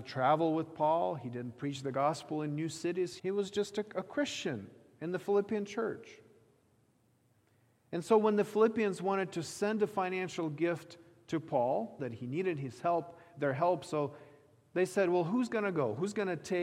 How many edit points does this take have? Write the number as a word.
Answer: two